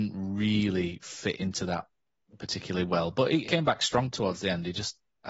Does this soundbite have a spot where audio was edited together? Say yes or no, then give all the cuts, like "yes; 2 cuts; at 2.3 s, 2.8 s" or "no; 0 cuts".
yes; 1 cut; at 3.4 s